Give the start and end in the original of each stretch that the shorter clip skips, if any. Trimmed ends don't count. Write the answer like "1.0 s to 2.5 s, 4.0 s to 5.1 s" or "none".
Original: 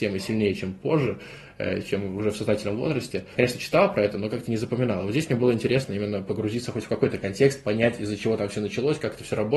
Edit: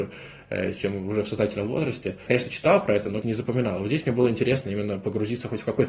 4.3 s to 4.5 s